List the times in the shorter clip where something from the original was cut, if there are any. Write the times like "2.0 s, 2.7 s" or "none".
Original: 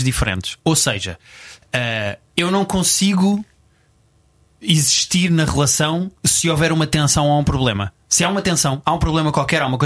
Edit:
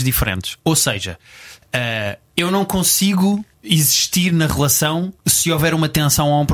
3.5 s